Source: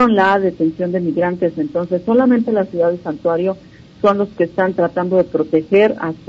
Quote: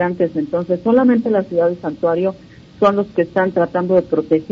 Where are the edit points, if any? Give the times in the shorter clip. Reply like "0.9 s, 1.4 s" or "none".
none

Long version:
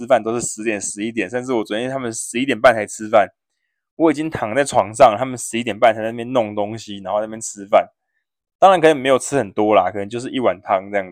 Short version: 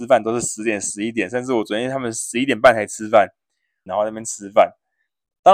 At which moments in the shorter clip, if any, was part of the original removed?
3.9 s

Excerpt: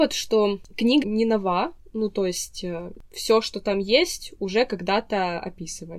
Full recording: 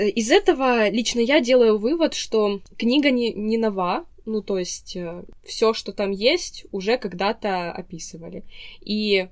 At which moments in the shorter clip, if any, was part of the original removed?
1.0 s

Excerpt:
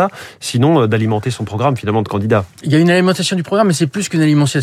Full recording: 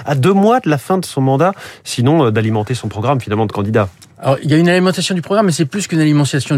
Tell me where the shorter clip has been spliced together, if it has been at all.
2.6 s

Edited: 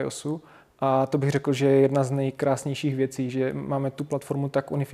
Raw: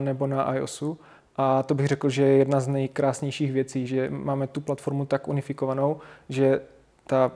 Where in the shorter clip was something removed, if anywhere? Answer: none

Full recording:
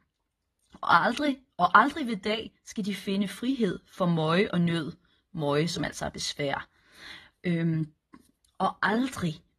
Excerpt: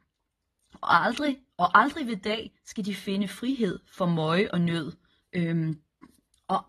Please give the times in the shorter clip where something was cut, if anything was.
5.2 s

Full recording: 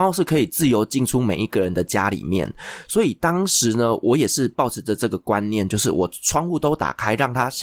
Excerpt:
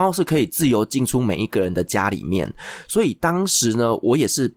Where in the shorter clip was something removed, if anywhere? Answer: none

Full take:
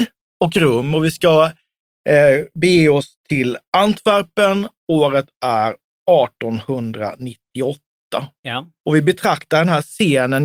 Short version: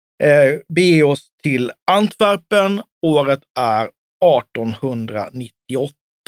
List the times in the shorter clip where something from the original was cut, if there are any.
none

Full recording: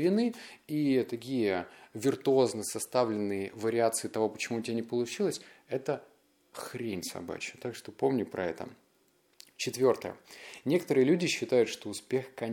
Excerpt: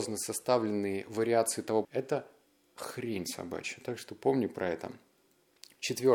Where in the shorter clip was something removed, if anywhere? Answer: 1.8 s

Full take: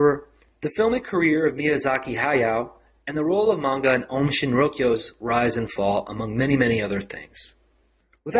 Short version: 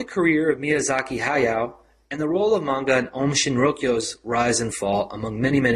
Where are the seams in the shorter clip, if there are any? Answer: none

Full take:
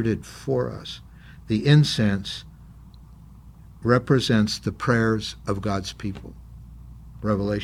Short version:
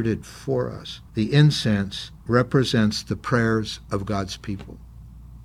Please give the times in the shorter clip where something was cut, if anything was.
1.1 s, 2.2 s

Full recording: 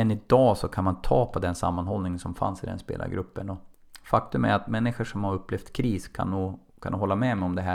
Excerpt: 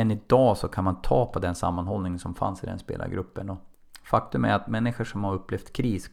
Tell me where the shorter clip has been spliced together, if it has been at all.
none

